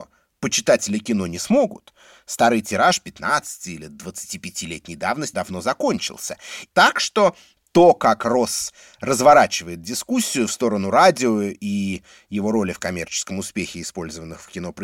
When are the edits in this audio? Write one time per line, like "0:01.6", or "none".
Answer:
0:05.3
0:06.7